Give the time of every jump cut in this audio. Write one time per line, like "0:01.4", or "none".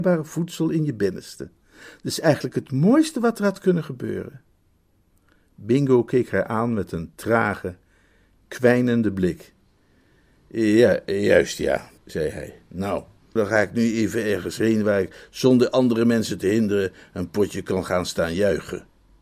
0:12.0
0:13.4